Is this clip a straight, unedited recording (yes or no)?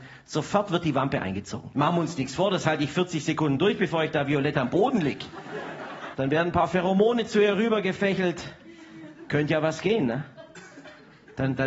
no